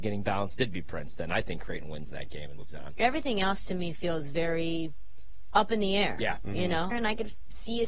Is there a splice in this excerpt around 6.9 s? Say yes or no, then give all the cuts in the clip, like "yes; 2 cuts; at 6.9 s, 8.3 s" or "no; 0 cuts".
yes; 1 cut; at 6.9 s